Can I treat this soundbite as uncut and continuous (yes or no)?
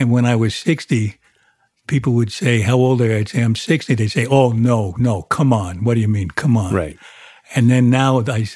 yes